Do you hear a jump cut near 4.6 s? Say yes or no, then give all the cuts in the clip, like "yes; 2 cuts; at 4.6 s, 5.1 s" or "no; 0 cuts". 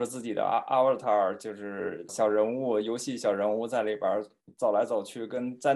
no; 1 cut; at 2.1 s